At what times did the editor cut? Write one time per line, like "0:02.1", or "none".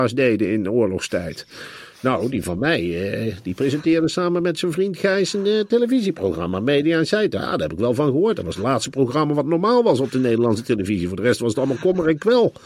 none